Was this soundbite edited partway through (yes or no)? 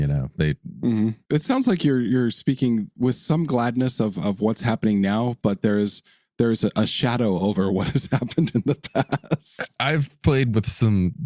yes